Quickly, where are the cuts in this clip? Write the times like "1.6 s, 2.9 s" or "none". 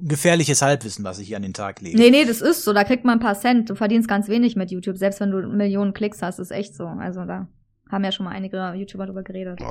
none

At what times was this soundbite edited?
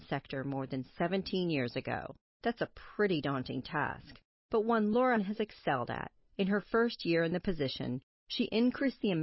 2.3 s

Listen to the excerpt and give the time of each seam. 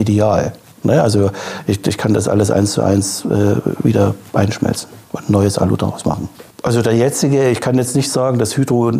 5.0 s, 6.5 s

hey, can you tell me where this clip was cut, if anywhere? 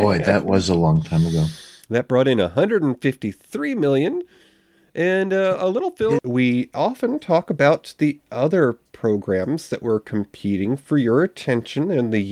6.2 s

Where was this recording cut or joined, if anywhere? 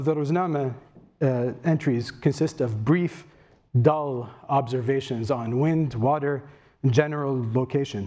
none

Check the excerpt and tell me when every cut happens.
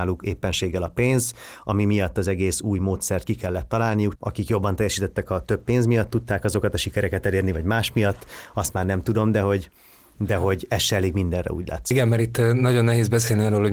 4.2 s

